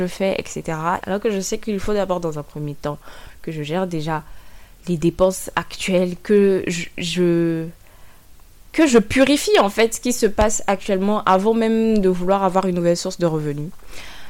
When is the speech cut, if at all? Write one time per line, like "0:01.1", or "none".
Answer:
0:01.0